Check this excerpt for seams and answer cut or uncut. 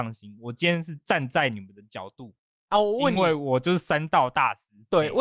uncut